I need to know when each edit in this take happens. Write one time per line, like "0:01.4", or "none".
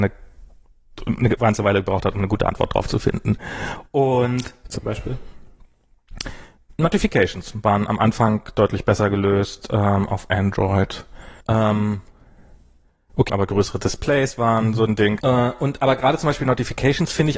0:11.4
0:13.3
0:15.2